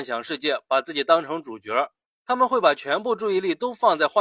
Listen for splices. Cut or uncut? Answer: cut